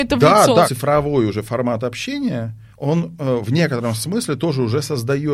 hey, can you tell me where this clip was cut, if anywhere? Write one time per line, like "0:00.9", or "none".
0:02.7